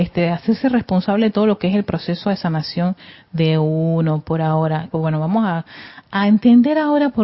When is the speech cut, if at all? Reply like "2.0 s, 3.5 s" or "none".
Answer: 4.9 s